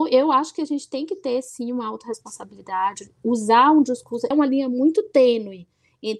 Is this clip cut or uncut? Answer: cut